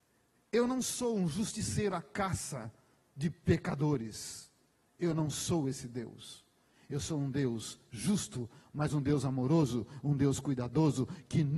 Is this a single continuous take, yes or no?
yes